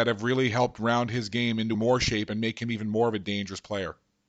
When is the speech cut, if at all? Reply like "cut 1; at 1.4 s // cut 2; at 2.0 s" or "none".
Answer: cut 1; at 1.7 s